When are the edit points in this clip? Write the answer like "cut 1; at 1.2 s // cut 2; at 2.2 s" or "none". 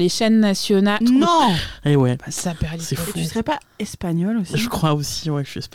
cut 1; at 1.0 s